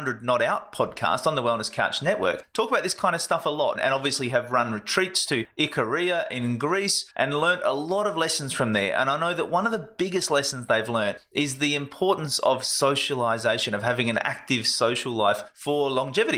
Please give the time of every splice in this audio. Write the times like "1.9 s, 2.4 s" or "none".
3.8 s